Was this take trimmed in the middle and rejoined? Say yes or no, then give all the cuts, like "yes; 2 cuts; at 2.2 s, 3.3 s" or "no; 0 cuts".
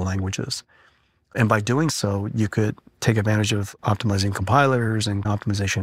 no; 0 cuts